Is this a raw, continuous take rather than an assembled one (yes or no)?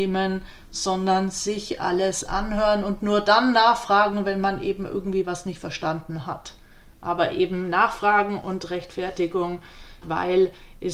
no